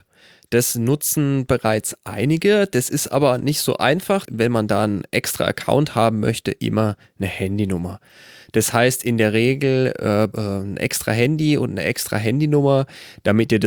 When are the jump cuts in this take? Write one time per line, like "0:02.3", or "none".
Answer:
0:04.3
0:10.3

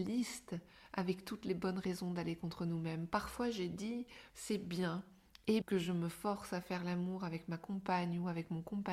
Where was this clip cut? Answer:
0:04.3
0:05.6

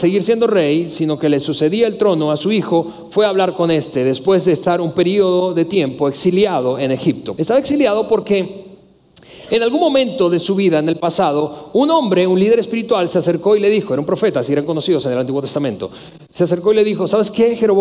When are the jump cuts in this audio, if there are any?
0:07.4

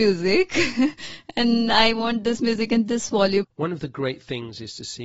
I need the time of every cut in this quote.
0:03.4

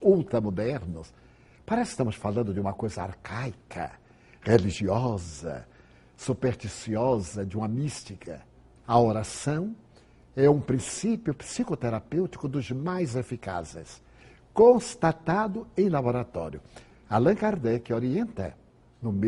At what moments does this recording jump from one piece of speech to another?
0:08.8
0:16.9

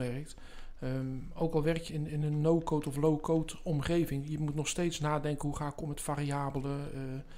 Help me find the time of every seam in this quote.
0:01.9

